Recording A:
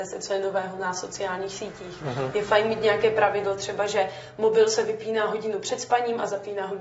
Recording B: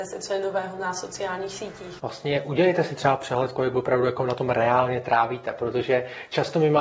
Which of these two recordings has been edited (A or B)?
B